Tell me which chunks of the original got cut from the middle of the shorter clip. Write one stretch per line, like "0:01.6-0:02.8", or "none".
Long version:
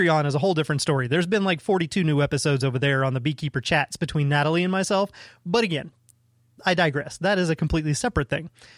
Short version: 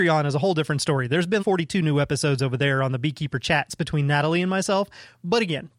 0:01.4-0:01.6